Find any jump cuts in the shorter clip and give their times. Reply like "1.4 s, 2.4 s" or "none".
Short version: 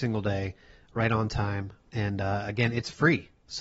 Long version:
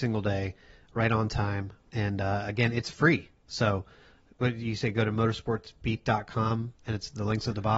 none